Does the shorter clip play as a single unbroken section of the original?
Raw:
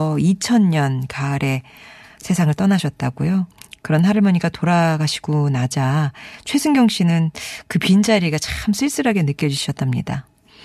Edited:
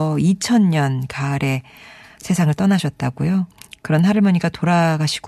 yes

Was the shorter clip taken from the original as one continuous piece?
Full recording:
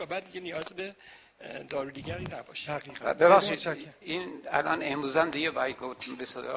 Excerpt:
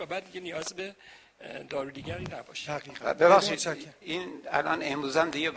yes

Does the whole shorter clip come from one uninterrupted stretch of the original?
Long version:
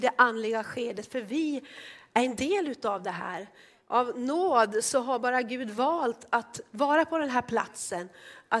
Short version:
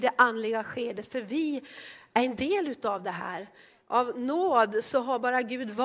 yes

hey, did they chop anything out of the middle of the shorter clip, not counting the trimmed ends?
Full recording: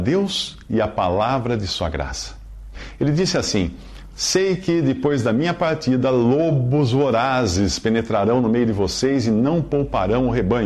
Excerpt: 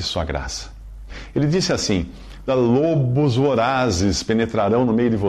yes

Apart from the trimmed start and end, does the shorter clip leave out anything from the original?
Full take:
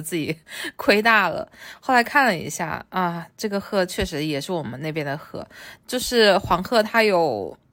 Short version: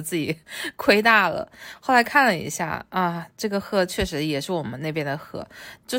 no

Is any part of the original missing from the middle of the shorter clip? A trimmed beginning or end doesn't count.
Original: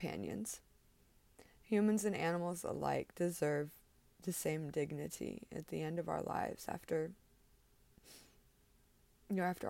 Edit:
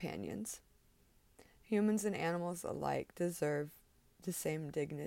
no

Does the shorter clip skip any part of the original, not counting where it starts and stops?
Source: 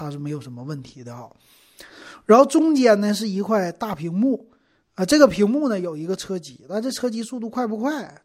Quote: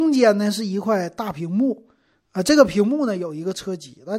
no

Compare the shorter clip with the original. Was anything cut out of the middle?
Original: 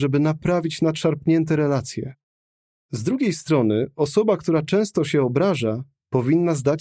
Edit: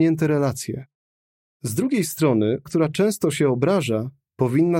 yes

